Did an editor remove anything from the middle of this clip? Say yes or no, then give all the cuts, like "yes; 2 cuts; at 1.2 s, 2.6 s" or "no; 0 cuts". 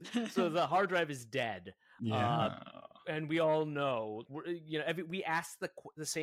yes; 1 cut; at 4.2 s